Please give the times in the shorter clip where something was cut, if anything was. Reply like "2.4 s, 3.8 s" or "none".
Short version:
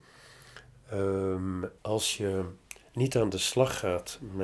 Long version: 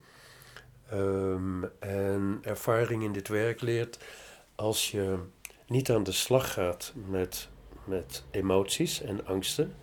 1.8 s

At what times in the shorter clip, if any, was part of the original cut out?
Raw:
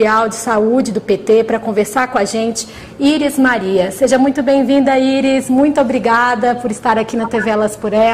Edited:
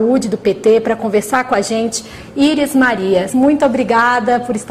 3.3 s

